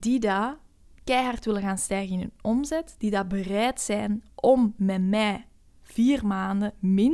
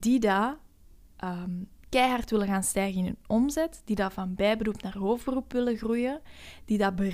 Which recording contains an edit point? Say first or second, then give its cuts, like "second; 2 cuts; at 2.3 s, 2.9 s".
first; 2 cuts; at 0.9 s, 3.0 s